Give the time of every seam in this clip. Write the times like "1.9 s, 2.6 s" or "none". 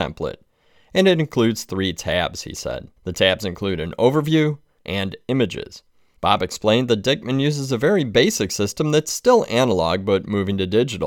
3.0 s, 4.8 s, 6.2 s

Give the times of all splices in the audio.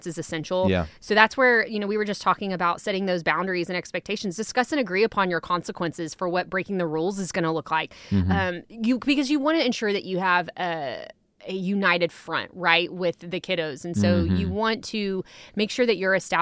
none

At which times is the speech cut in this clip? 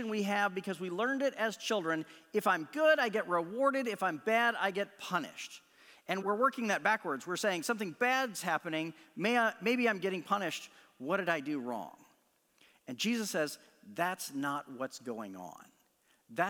6.2 s

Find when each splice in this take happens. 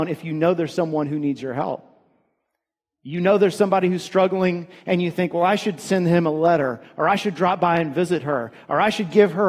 none

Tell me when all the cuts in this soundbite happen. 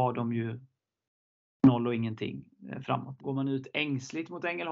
3.2 s

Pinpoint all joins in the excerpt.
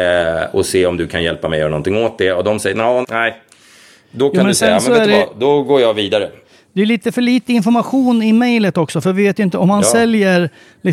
3.0 s

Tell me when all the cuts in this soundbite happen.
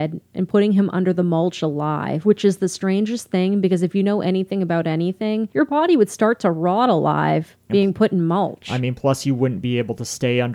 none

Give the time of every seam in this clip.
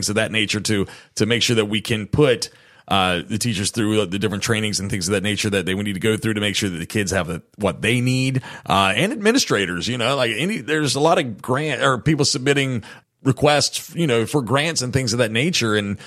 none

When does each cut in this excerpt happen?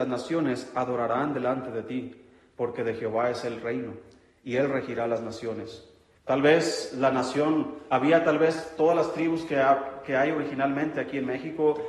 6.2 s

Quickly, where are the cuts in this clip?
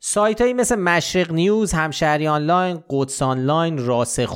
none

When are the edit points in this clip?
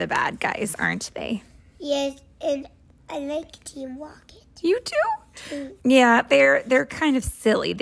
5.8 s

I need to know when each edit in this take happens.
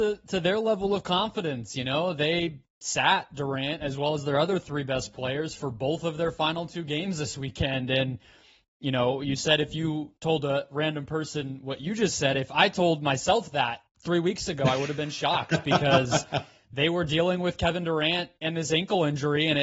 none

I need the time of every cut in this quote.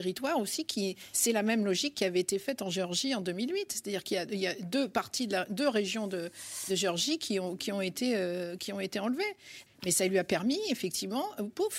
9.7 s

